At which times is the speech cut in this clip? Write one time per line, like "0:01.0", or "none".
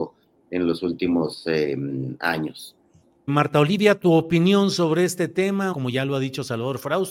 0:03.3
0:05.7